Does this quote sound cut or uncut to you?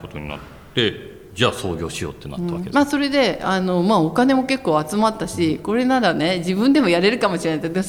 uncut